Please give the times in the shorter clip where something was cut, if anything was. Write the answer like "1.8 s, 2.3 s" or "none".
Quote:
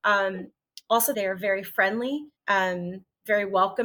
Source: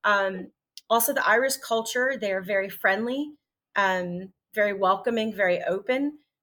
1.1 s, 2.4 s